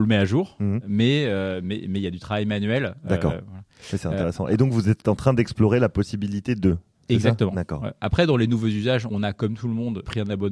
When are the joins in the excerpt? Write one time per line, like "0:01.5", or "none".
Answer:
none